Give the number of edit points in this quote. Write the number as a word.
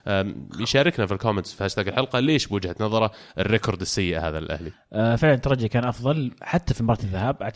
one